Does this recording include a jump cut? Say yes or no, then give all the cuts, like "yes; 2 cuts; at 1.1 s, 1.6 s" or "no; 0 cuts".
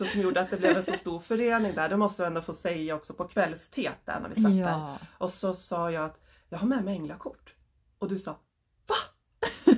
no; 0 cuts